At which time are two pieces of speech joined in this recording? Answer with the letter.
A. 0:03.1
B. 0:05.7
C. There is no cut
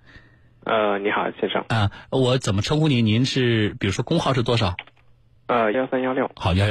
B